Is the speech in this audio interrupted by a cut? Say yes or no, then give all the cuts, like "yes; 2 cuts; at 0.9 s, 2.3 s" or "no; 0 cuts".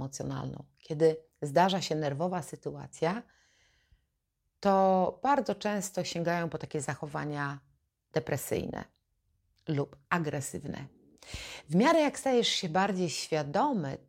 no; 0 cuts